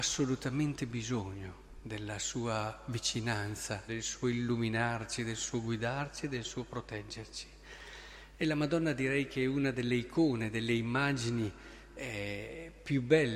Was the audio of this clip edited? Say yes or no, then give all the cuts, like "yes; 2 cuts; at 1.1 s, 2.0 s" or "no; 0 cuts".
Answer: yes; 1 cut; at 3.9 s